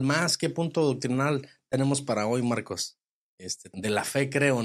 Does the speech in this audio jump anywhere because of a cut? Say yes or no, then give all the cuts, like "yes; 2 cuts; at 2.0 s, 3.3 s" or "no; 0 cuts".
yes; 1 cut; at 3.7 s